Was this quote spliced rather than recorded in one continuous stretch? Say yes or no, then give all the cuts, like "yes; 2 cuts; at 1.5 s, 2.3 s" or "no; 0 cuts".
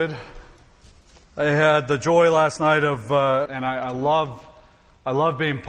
yes; 2 cuts; at 1.2 s, 3.5 s